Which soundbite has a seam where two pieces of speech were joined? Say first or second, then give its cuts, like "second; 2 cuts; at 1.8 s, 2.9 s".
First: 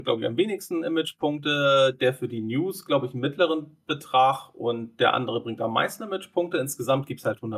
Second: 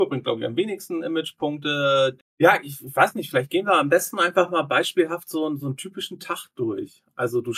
second; 1 cut; at 2.2 s